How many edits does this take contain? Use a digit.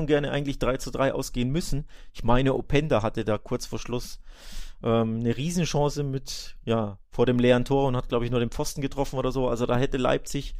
0